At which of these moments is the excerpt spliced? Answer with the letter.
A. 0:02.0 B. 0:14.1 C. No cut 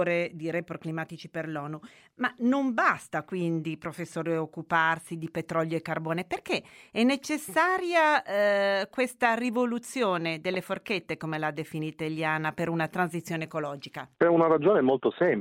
B